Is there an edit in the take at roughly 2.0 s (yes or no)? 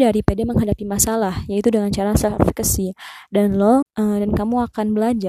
no